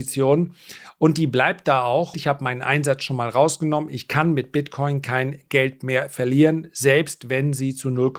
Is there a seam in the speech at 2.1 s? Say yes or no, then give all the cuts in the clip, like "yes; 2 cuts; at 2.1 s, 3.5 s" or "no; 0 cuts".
yes; 1 cut; at 2.1 s